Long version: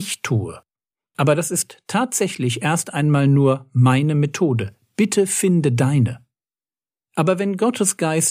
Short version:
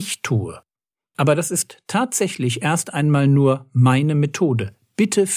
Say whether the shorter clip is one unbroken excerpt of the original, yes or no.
yes